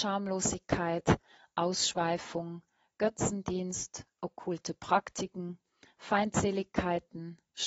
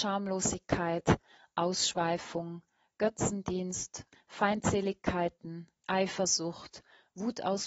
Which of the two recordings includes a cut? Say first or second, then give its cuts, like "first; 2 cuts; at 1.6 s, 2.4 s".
second; 2 cuts; at 4.1 s, 5.8 s